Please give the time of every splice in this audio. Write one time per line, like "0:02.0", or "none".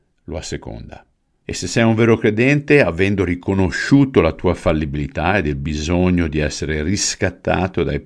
0:01.4